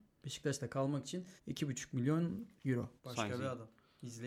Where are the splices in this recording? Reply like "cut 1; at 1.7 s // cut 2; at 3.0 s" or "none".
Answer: cut 1; at 1.4 s // cut 2; at 3.0 s